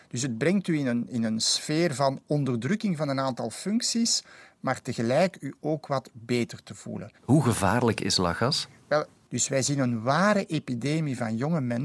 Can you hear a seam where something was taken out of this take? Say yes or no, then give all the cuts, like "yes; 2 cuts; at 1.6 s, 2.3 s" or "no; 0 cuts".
yes; 2 cuts; at 7.2 s, 9.3 s